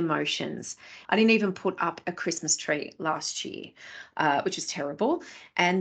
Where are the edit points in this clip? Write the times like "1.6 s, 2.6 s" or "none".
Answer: 1.1 s